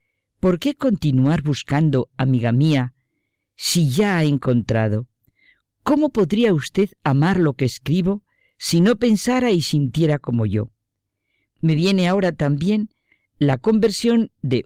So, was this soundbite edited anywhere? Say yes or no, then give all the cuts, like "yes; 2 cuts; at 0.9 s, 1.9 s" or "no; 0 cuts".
no; 0 cuts